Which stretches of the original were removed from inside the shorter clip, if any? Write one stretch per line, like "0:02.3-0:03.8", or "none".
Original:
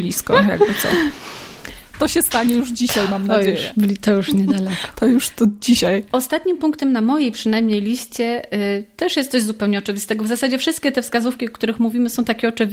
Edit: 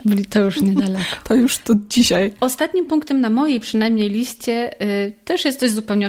none